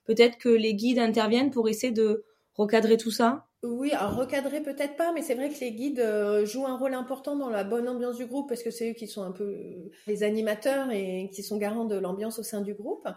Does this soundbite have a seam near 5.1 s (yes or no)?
no